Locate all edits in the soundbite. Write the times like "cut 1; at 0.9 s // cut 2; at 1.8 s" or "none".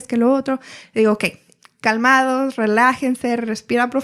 none